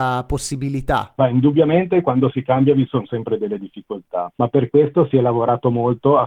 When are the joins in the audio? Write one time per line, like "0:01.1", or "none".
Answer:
0:04.3